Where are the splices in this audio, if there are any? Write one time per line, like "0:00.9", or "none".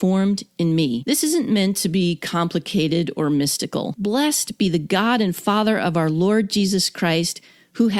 none